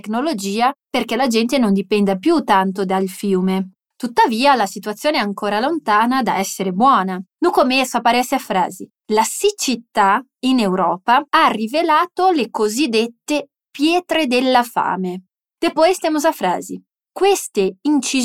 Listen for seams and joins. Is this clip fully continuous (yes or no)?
no